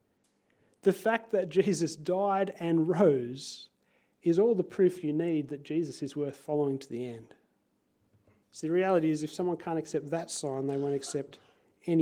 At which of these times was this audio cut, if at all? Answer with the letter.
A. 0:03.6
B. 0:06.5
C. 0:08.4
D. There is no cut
C